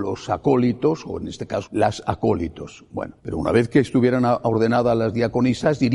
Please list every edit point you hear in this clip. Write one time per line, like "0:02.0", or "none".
0:01.7
0:03.2